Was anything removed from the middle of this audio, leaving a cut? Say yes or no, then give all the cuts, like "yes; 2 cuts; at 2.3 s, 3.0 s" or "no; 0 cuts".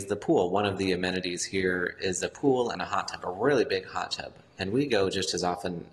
no; 0 cuts